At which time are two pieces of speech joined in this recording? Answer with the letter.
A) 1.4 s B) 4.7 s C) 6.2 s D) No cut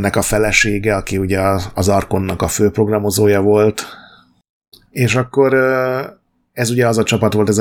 B